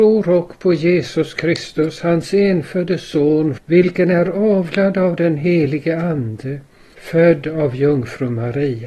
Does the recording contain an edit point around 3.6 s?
yes; 1 cut; at 3.6 s

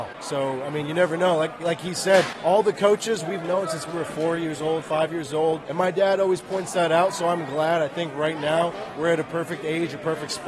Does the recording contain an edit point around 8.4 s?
no; 1 cut; at 5.7 s

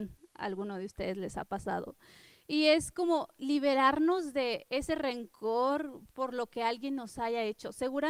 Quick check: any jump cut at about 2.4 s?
no; 0 cuts

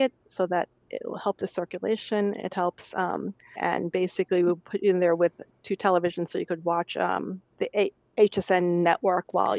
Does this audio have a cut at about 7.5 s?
yes; 2 cuts; at 3.6 s, 7.5 s

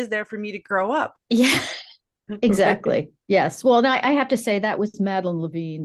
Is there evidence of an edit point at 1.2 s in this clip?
no; 1 cut; at 3.2 s

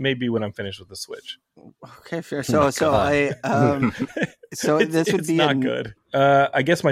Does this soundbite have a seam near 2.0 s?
no; 1 cut; at 6.0 s

